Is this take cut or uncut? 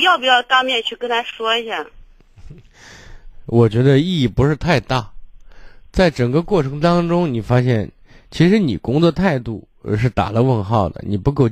uncut